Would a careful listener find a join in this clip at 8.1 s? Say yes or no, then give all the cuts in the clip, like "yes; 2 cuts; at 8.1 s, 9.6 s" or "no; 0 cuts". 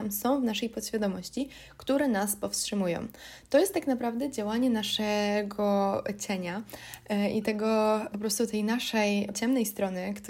yes; 2 cuts; at 8.1 s, 9.3 s